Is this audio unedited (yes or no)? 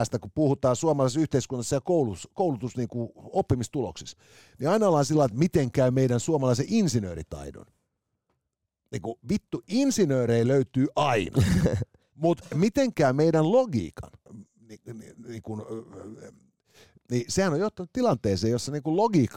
no